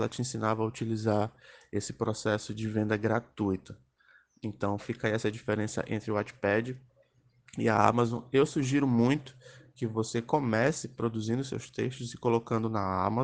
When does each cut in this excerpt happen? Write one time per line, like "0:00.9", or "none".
none